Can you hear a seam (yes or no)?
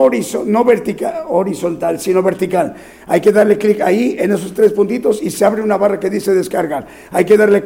no